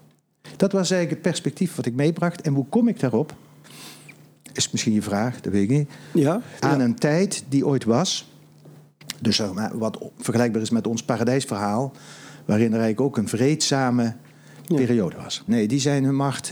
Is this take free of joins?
no; 2 cuts; at 6.6 s, 15.5 s

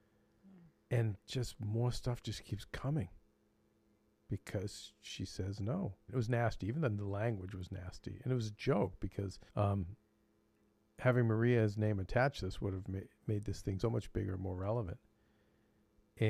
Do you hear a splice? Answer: yes; 3 cuts; at 6.1 s, 9.5 s, 13.8 s

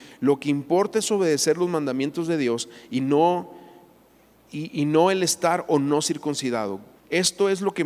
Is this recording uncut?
no; 1 cut; at 6.9 s

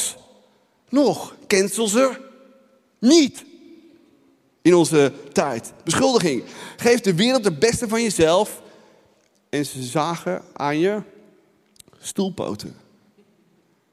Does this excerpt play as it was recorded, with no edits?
yes; 0 cuts

